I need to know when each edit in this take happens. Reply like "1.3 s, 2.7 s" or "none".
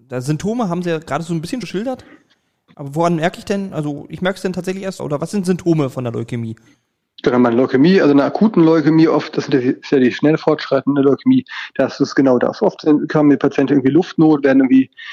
1.6 s, 5.0 s